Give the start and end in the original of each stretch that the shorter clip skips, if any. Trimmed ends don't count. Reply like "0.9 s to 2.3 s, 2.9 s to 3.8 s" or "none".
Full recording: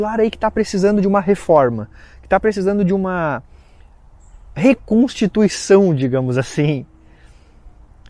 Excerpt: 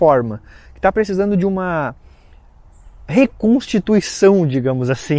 none